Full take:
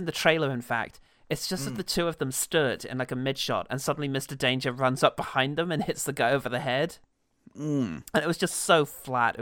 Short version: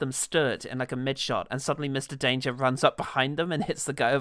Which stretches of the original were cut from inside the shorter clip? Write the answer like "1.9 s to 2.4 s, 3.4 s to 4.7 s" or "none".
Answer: none